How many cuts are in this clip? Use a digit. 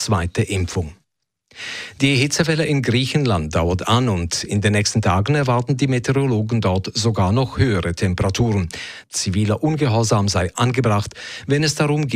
1